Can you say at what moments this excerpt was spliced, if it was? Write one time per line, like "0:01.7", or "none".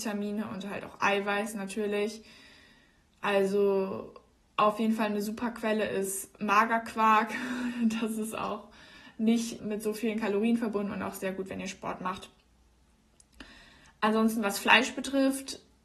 0:09.6